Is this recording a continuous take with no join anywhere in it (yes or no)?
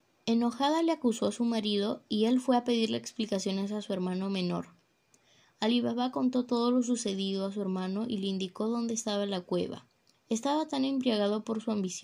no